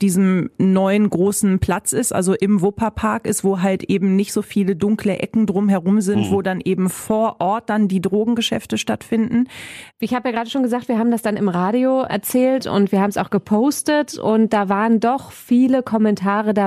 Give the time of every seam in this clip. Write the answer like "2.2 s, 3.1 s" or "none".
9.9 s, 12.1 s